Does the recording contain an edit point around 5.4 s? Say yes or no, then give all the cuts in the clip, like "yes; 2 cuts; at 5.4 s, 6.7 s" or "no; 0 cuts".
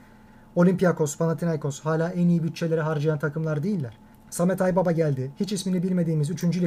no; 1 cut; at 4.1 s